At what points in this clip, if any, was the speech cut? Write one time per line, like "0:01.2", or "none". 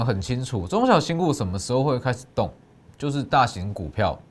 none